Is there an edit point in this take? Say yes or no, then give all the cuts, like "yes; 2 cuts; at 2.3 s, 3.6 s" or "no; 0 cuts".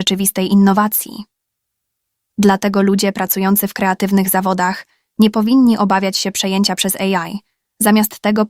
no; 0 cuts